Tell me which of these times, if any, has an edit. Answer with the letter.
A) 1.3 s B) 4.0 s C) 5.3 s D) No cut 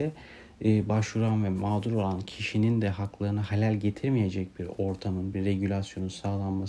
C